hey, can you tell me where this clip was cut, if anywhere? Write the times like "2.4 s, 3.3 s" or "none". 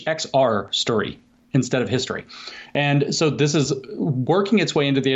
none